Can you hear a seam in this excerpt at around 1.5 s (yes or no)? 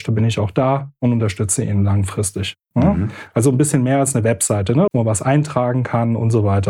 no